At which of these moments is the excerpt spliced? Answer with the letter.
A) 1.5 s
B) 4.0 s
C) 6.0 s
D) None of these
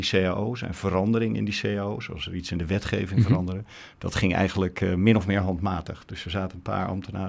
D